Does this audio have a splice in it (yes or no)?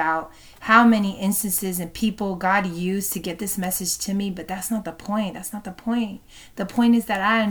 no